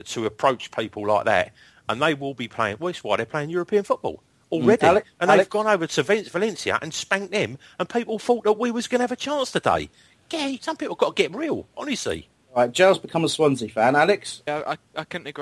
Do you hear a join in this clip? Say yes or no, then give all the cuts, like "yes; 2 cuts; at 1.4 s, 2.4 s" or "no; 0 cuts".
yes; 2 cuts; at 10.6 s, 14.5 s